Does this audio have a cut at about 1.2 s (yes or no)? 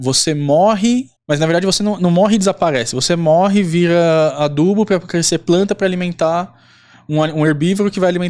yes